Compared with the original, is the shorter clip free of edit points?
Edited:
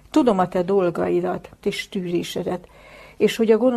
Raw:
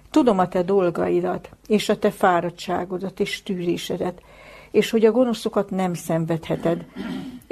no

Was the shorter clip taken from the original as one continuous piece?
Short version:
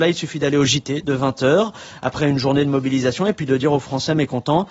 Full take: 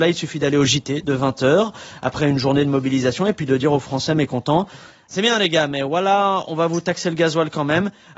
yes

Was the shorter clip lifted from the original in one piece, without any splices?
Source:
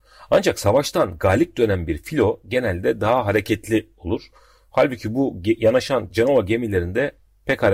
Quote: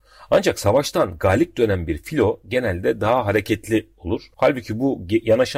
no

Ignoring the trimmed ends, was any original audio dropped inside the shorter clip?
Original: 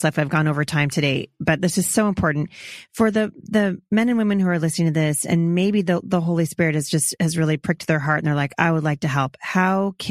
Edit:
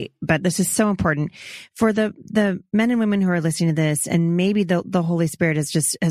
no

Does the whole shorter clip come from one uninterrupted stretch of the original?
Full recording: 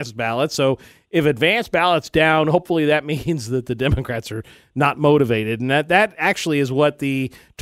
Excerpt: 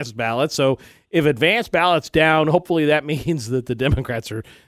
yes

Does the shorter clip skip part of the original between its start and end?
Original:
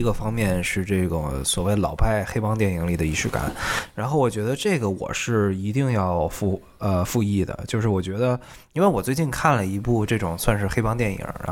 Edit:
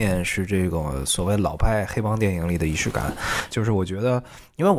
yes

